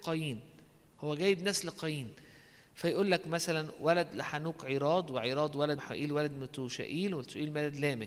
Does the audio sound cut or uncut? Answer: cut